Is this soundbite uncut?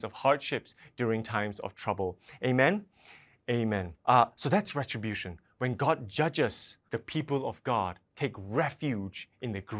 no; 2 cuts; at 4.0 s, 6.9 s

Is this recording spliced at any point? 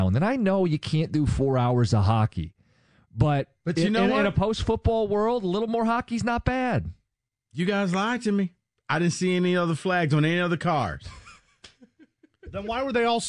no; 0 cuts

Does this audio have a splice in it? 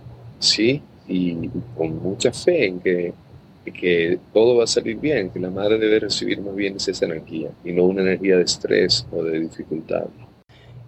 yes; 1 cut; at 7.5 s

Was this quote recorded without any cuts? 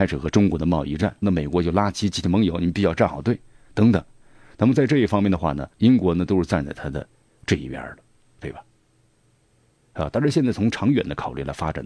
no; 2 cuts; at 1.2 s, 5.7 s

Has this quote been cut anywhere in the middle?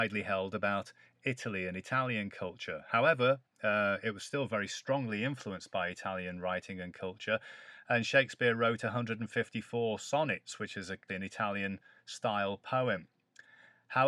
yes; 1 cut; at 11.1 s

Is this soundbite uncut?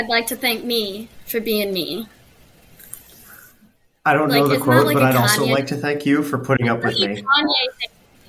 yes; 0 cuts

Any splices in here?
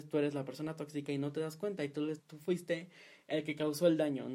yes; 1 cut; at 2.2 s

